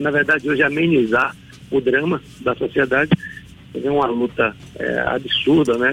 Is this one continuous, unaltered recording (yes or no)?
no